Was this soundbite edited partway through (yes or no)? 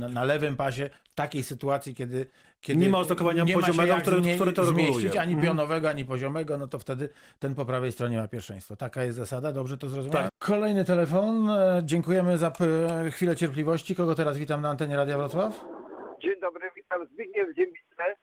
yes